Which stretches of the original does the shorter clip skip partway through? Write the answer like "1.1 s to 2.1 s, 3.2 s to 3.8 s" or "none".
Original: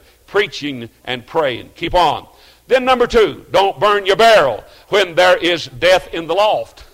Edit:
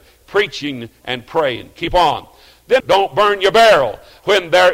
2.8 s to 3.4 s